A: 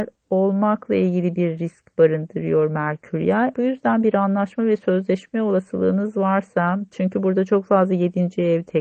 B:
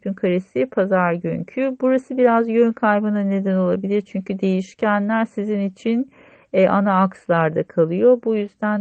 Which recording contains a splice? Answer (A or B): A